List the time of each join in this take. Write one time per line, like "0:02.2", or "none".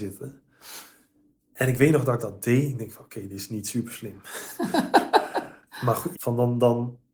0:06.1